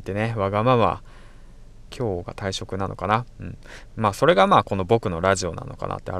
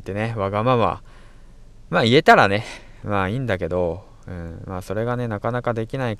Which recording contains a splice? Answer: first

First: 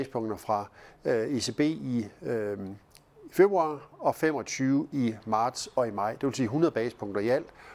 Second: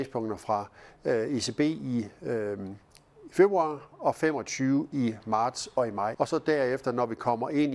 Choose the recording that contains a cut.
second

